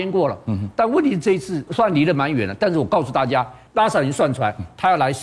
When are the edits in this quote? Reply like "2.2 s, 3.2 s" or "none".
1.7 s, 3.7 s